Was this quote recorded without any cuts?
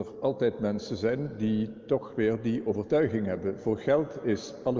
yes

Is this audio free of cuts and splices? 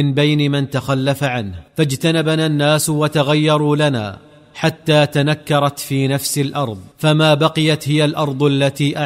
no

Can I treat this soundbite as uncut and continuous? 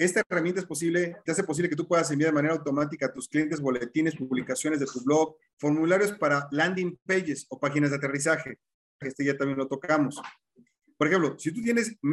no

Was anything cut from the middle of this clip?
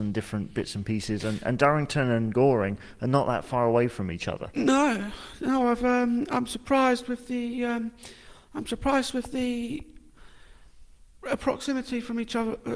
no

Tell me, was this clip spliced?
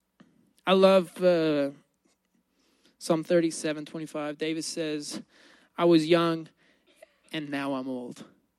no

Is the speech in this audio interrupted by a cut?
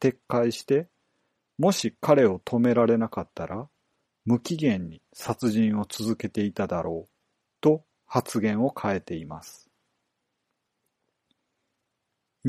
no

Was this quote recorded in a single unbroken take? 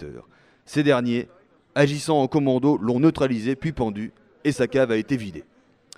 yes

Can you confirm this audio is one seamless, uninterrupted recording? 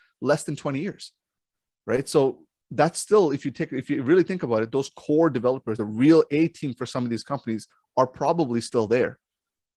yes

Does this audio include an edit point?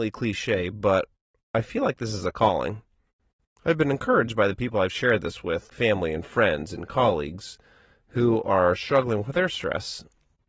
yes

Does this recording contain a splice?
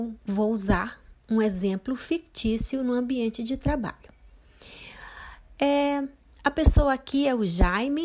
no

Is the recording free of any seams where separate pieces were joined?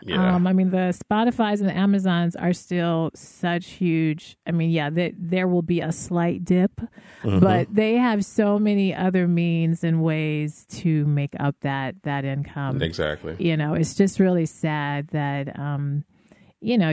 yes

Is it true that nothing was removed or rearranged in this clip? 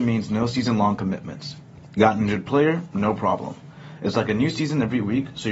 yes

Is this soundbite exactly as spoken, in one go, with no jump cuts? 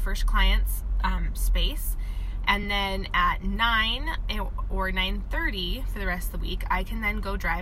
yes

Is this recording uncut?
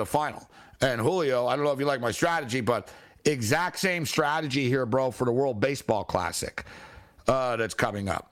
yes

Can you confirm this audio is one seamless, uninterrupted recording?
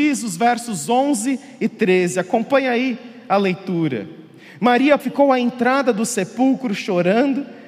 no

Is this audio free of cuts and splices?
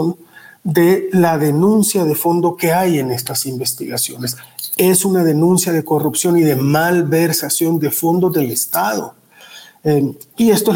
yes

